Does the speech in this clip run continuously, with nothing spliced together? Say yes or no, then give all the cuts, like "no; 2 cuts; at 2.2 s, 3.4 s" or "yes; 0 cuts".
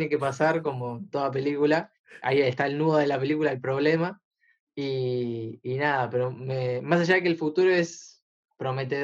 yes; 0 cuts